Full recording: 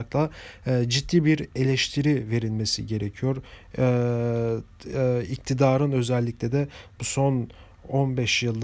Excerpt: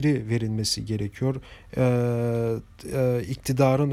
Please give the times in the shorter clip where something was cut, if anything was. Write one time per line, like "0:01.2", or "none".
none